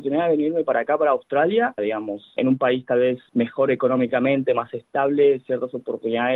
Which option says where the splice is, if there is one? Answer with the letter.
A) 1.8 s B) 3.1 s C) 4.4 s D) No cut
A